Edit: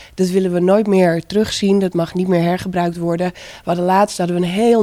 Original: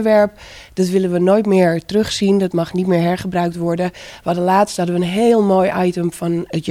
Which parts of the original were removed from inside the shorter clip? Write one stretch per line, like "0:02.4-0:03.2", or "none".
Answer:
none